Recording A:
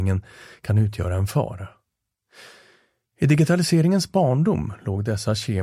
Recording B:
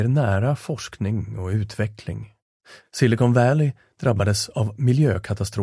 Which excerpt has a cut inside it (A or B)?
B